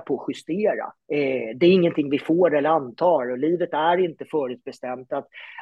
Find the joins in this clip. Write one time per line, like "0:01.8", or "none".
0:01.0